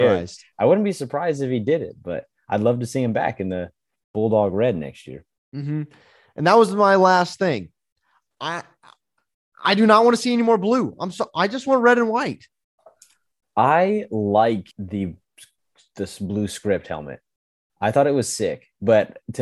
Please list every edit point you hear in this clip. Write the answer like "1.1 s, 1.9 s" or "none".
14.7 s